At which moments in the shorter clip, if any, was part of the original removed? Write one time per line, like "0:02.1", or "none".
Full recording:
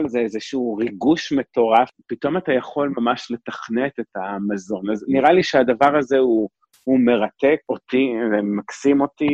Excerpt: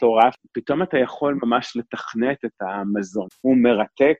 0:03.3

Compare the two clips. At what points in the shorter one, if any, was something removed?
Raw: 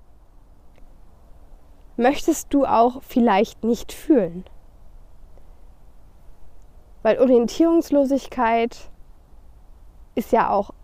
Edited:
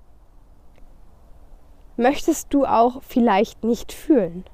none

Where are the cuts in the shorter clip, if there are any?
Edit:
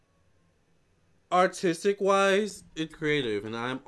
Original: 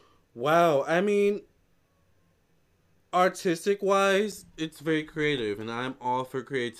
0:02.9

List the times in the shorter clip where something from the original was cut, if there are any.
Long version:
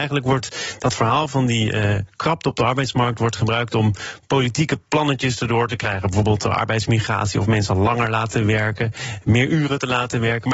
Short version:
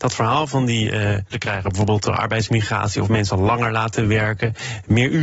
0:01.3

